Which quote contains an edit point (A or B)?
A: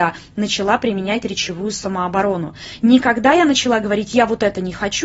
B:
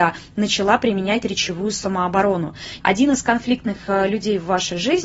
B